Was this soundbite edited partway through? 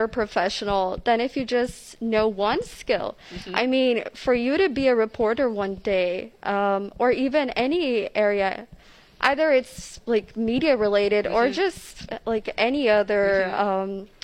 no; 0 cuts

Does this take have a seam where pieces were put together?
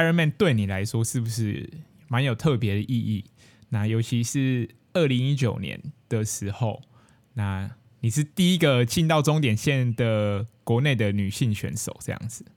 yes; 1 cut; at 8.3 s

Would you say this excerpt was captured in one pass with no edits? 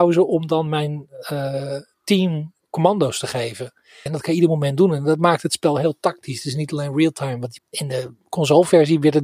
no; 2 cuts; at 4.1 s, 7.6 s

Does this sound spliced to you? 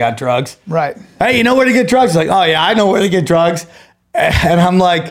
no; 0 cuts

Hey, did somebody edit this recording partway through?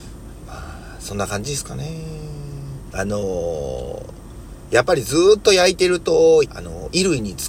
yes; 2 cuts; at 2.9 s, 6.4 s

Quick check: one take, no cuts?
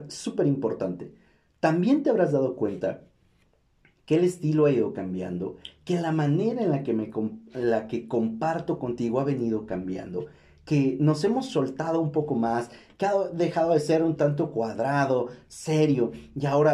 yes; 0 cuts

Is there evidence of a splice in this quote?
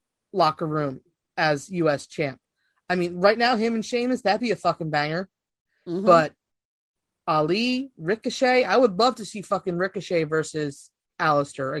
no; 0 cuts

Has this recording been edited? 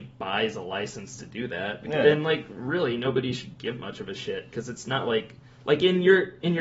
no; 0 cuts

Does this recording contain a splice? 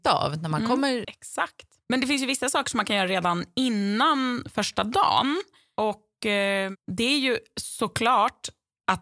yes; 1 cut; at 1.0 s

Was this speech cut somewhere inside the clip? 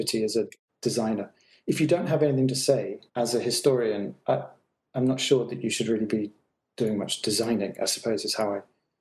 yes; 1 cut; at 3.1 s

